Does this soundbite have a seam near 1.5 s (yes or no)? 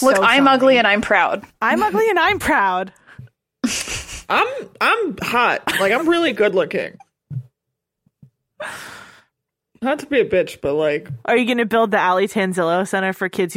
yes